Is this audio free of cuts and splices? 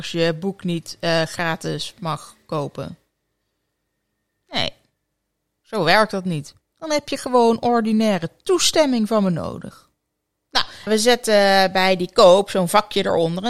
no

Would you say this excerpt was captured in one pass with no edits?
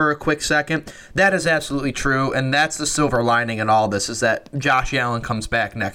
yes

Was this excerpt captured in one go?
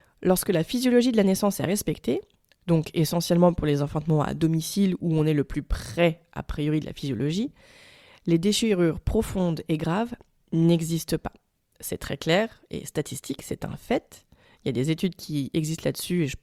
yes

